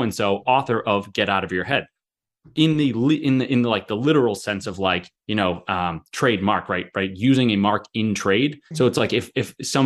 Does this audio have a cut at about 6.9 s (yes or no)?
no